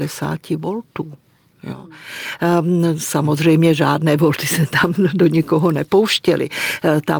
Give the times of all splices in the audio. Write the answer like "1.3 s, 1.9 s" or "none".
none